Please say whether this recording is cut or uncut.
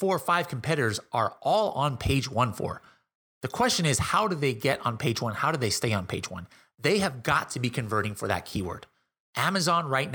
uncut